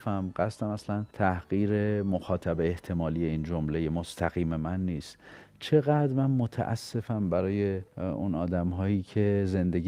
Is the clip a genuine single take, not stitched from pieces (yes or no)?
no